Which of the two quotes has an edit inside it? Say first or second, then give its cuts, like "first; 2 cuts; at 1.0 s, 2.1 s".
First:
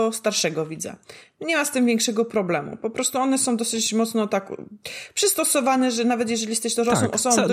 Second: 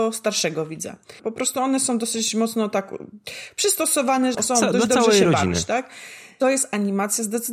second; 2 cuts; at 1.2 s, 4.3 s